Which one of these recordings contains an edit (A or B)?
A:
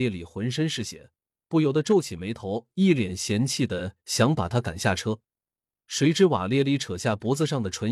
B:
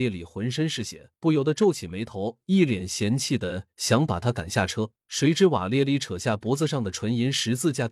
B